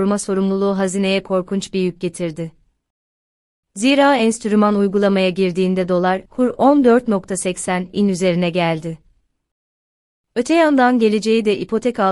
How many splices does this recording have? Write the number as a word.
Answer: one